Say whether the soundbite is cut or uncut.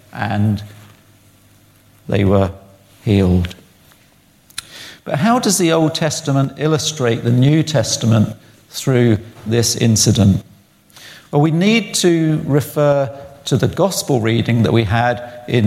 uncut